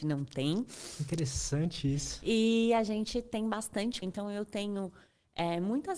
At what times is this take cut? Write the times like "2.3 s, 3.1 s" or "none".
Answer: 4.0 s